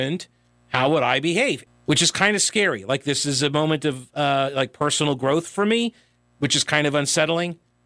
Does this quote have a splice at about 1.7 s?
yes; 1 cut; at 1.7 s

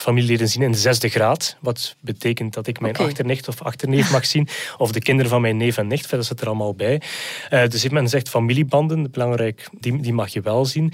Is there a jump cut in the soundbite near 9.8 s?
yes; 1 cut; at 9.8 s

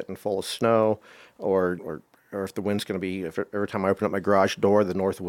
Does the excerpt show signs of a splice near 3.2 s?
no; 1 cut; at 1.8 s

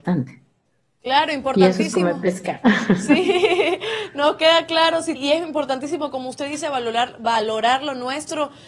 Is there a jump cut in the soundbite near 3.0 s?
no; 1 cut; at 5.1 s

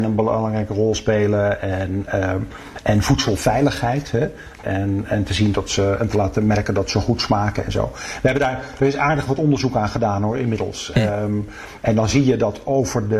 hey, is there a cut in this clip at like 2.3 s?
no; 1 cut; at 4.6 s

